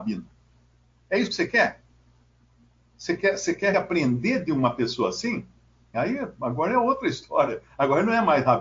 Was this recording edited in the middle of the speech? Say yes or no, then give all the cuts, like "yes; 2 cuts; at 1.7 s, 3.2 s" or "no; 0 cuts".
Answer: yes; 2 cuts; at 3.7 s, 5.9 s